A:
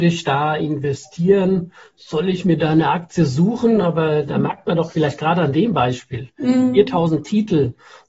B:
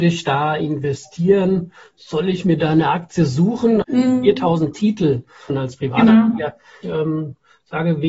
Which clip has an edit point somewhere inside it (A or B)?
B